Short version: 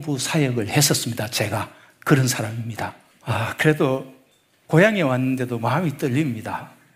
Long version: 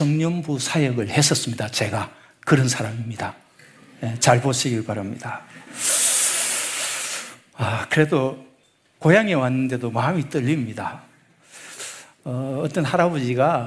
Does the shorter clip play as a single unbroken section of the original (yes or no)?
no